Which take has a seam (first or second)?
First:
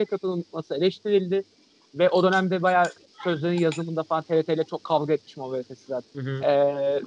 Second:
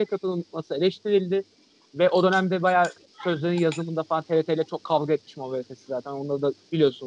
first